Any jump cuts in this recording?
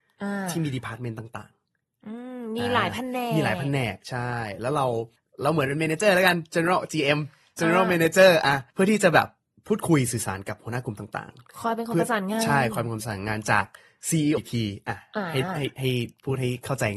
yes; 1 cut; at 14.4 s

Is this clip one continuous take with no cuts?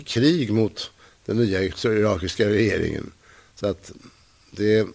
yes; 0 cuts

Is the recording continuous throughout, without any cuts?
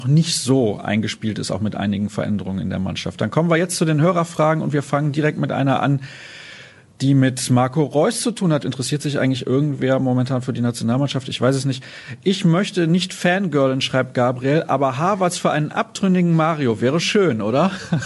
no; 2 cuts; at 8.6 s, 17.0 s

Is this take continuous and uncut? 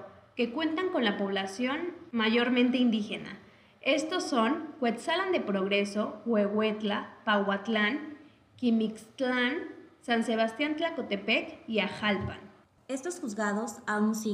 yes; 0 cuts

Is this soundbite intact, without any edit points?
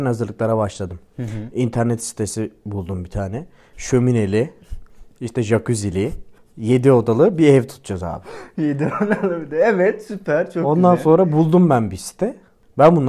yes; 0 cuts

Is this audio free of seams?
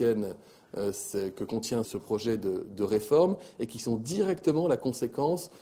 no; 1 cut; at 1.8 s

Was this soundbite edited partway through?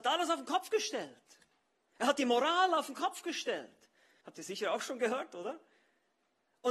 yes; 1 cut; at 4.2 s

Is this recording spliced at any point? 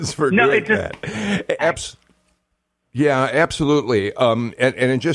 yes; 1 cut; at 1.6 s

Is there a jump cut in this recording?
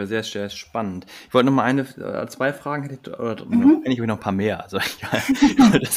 no; 0 cuts

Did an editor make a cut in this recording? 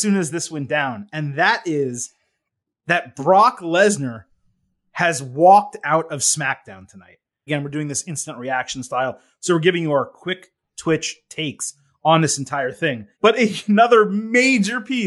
yes; 2 cuts; at 7.5 s, 13.1 s

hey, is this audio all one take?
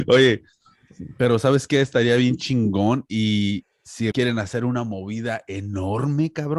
no; 1 cut; at 4.1 s

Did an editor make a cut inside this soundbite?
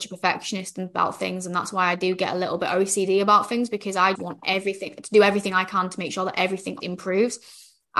yes; 2 cuts; at 4.2 s, 6.8 s

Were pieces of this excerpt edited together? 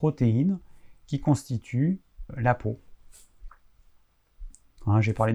yes; 1 cut; at 2.3 s

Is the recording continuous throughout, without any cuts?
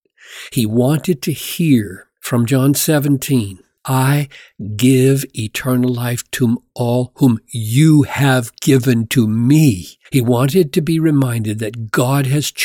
no; 2 cuts; at 3.8 s, 10.1 s

